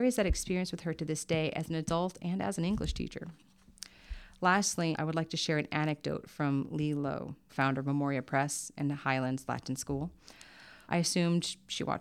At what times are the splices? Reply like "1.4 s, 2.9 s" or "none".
4.9 s, 7.5 s, 10.9 s

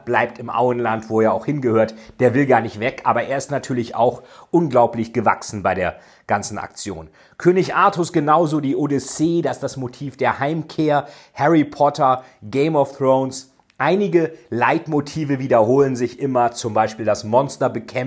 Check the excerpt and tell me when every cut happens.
none

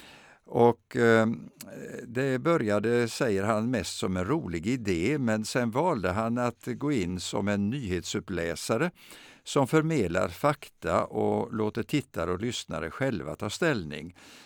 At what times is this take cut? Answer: none

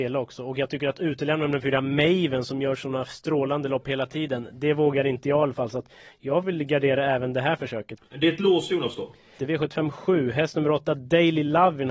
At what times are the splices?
8.0 s, 9.4 s

